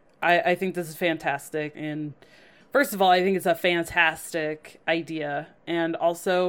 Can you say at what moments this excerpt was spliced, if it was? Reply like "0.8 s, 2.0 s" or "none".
1.7 s